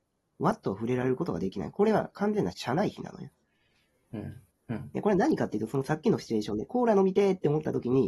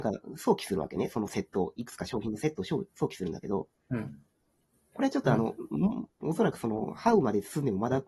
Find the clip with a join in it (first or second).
first